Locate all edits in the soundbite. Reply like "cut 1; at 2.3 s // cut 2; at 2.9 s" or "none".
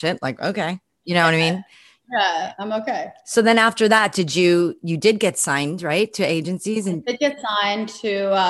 none